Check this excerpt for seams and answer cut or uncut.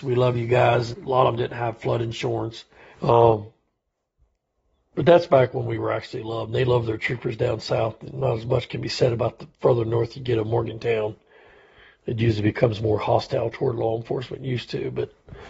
cut